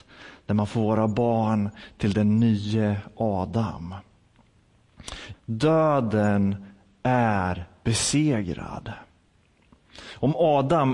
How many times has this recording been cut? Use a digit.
1